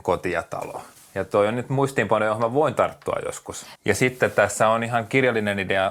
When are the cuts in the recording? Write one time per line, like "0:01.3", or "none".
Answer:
0:03.8